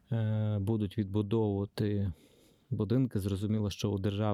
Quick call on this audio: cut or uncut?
uncut